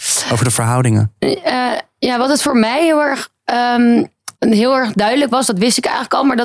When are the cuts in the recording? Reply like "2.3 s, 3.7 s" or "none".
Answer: 4.3 s